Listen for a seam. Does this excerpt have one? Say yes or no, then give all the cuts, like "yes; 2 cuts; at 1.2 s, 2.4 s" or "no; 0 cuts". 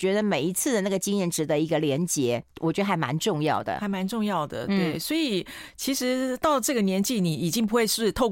no; 0 cuts